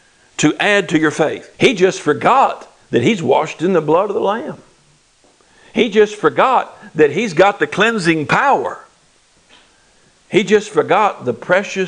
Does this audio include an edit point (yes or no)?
yes